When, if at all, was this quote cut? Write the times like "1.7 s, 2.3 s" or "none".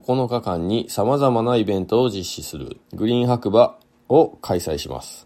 2.8 s